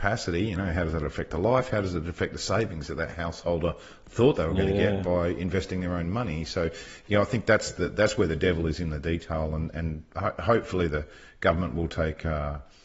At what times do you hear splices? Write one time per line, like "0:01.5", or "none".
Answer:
none